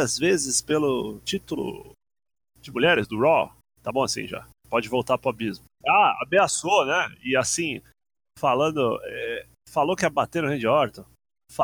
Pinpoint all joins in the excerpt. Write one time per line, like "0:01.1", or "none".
0:03.6
0:05.8